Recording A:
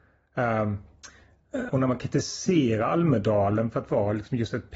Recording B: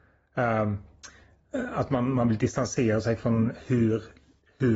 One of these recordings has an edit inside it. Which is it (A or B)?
A